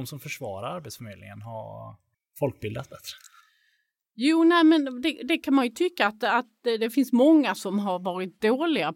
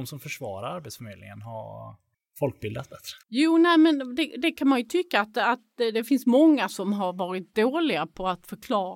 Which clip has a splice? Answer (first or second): second